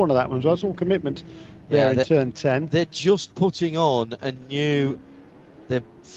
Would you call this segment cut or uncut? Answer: uncut